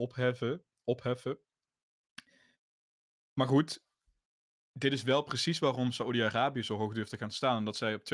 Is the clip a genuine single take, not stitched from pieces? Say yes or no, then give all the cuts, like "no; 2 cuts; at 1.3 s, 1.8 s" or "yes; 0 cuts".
yes; 0 cuts